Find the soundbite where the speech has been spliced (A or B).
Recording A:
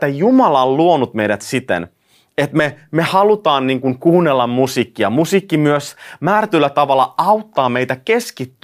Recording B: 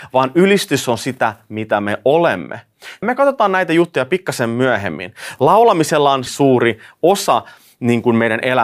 B